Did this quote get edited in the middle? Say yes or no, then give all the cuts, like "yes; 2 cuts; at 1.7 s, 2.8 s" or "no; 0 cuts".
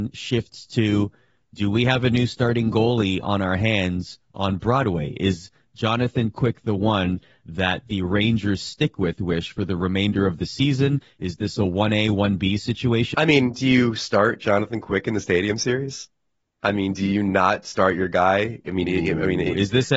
yes; 1 cut; at 13.1 s